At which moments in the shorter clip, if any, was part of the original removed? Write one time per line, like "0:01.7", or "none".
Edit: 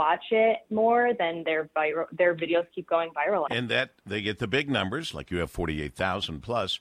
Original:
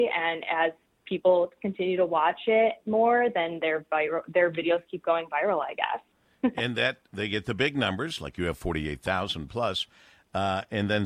0:03.5